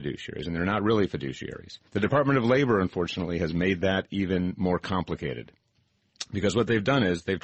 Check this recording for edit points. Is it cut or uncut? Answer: cut